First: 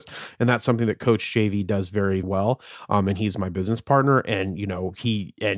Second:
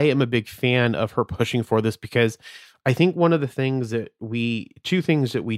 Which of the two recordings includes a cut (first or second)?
first